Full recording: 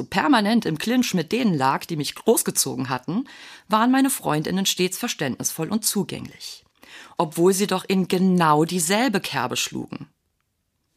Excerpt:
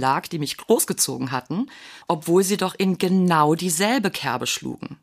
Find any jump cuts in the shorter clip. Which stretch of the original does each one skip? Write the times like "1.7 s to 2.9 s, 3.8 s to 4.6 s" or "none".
3.6 s to 7.1 s